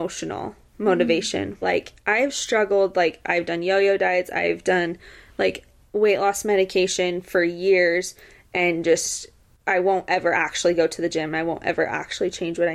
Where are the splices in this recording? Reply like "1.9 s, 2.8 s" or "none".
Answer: 1.6 s